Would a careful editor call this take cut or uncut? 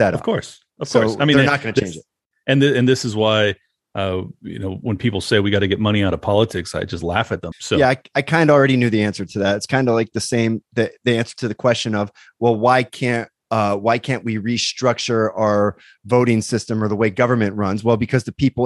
cut